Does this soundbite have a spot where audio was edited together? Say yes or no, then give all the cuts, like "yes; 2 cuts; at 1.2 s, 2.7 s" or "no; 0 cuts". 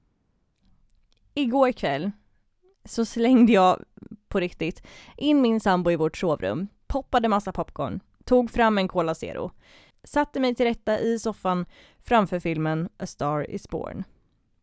no; 0 cuts